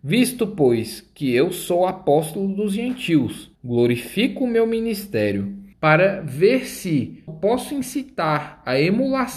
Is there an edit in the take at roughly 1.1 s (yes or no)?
no